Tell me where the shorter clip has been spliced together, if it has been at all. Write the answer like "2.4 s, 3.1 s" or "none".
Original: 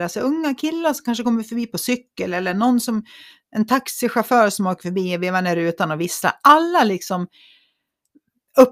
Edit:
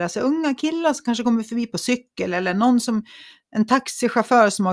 none

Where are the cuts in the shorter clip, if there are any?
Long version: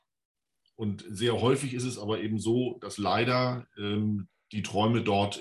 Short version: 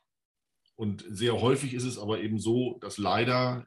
none

